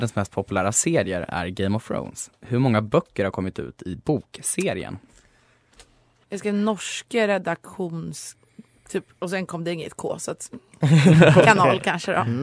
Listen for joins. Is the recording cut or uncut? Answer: cut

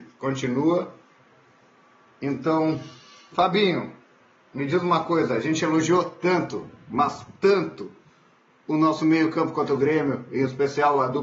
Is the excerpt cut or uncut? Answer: uncut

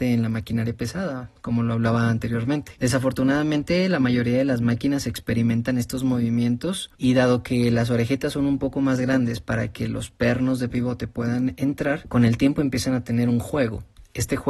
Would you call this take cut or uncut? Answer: uncut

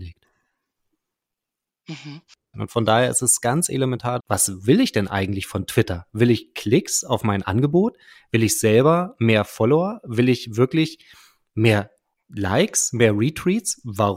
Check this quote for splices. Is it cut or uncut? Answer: cut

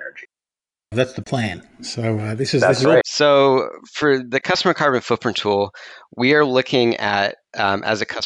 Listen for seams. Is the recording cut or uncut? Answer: cut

